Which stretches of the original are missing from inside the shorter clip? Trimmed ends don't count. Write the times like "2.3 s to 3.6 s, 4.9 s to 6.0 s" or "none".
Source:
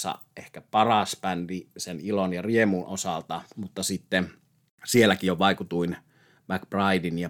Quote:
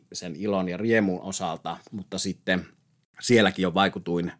none